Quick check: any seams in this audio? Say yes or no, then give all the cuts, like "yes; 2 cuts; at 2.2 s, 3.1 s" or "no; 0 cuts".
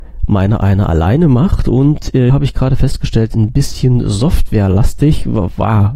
yes; 1 cut; at 2.3 s